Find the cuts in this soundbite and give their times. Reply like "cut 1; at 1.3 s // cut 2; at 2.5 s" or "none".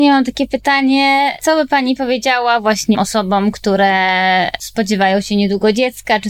cut 1; at 2.9 s